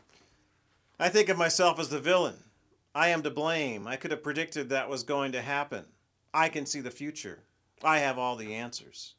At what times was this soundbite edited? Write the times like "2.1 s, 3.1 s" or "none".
none